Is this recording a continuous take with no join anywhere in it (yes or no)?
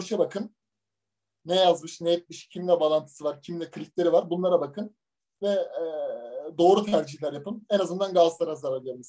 yes